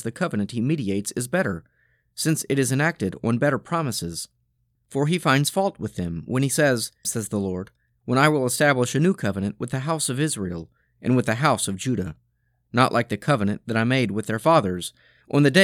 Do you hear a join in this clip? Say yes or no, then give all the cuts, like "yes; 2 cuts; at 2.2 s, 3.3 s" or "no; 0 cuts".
yes; 2 cuts; at 4.8 s, 7.0 s